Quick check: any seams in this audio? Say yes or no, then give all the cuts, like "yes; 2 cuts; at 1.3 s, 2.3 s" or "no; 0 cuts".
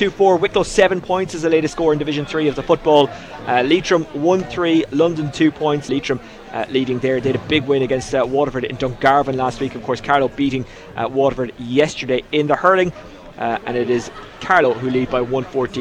yes; 2 cuts; at 5.9 s, 13.3 s